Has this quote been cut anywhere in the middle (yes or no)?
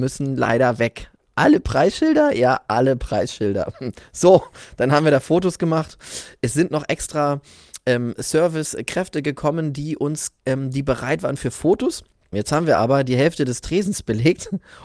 yes